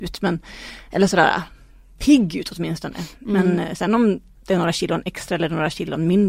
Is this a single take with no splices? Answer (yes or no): yes